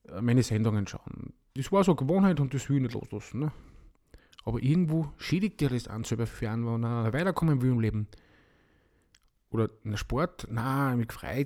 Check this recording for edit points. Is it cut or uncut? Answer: cut